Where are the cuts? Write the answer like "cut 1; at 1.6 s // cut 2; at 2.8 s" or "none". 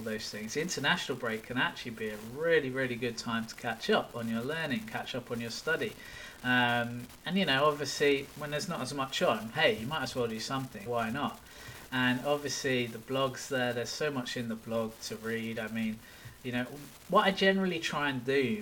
cut 1; at 10.9 s